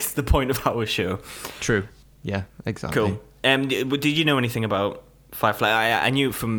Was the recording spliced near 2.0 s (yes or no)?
yes